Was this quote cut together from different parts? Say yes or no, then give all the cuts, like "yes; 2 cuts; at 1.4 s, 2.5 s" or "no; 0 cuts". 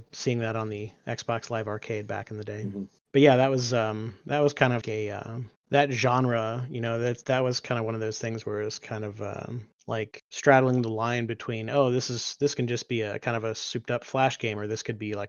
yes; 1 cut; at 4.8 s